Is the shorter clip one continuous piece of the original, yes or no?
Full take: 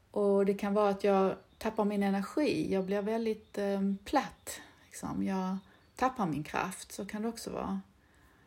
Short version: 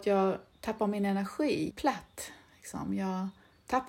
no